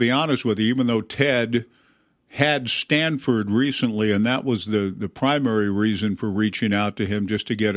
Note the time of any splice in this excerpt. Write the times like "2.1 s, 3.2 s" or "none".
none

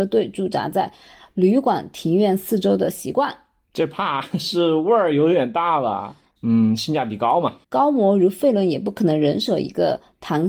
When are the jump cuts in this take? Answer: 6.4 s, 7.6 s

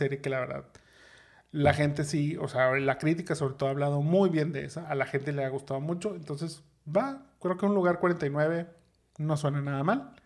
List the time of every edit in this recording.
none

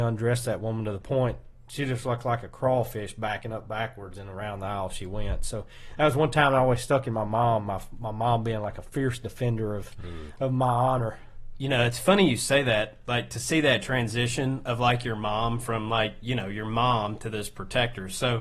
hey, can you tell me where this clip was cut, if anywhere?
none

